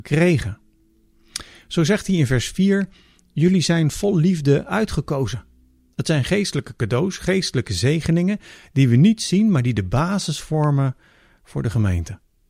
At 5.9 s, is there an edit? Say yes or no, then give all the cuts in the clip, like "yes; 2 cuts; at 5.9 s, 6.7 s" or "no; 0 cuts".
yes; 1 cut; at 5.9 s